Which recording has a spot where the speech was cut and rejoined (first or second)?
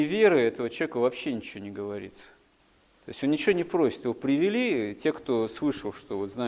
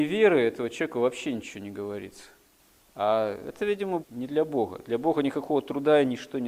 second